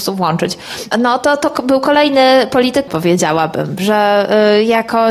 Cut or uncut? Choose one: cut